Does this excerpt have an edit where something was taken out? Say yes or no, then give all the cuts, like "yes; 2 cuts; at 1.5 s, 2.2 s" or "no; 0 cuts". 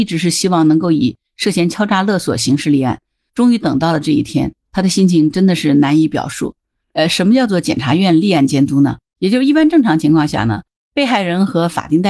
yes; 2 cuts; at 6.8 s, 9.1 s